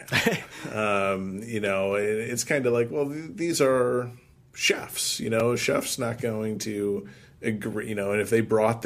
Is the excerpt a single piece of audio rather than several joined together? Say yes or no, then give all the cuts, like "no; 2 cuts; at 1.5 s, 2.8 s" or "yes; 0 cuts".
yes; 0 cuts